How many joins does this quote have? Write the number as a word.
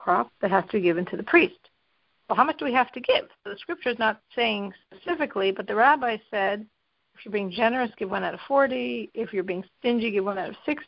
zero